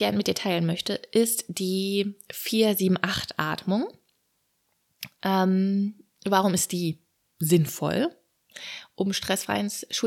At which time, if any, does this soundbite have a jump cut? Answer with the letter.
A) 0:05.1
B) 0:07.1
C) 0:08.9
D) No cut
D